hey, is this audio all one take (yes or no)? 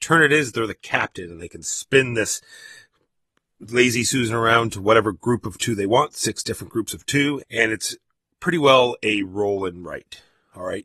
no